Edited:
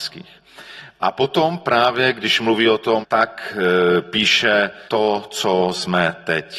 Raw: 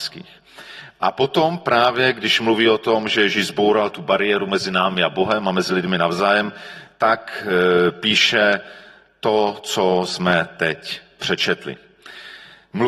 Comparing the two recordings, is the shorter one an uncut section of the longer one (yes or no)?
no